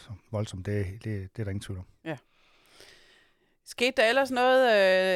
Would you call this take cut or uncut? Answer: uncut